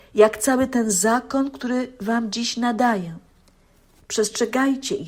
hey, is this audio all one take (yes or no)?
no